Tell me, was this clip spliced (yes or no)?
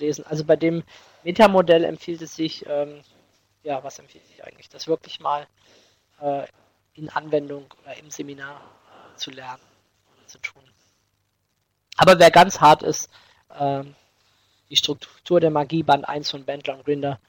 no